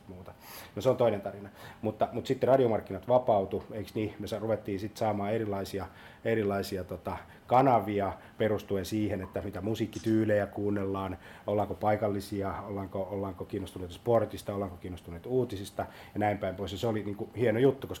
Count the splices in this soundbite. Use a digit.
0